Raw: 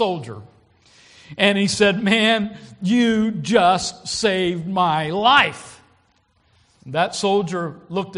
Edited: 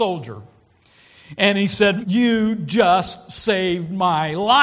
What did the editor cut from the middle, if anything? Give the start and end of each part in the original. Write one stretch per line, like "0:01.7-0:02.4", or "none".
0:02.0-0:02.8